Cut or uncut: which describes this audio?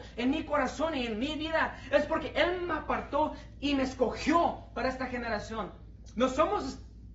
uncut